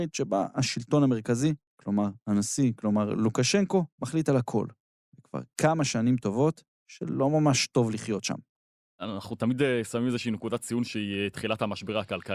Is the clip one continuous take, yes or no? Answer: yes